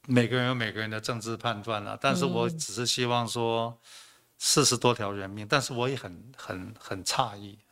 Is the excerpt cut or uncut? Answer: uncut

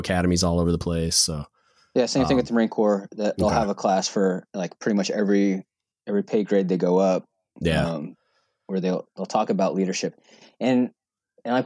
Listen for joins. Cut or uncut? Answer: uncut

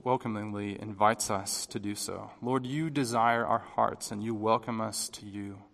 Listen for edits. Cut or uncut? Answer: uncut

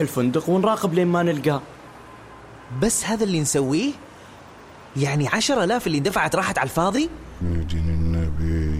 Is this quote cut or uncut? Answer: cut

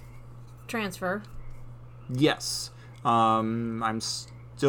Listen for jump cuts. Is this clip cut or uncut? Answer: uncut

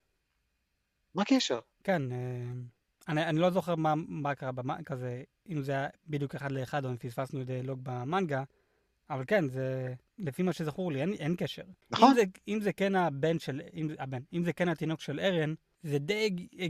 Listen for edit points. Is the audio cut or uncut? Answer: uncut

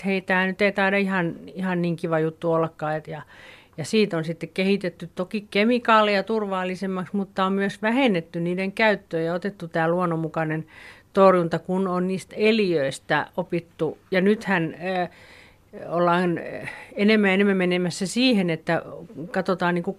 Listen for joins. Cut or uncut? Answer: uncut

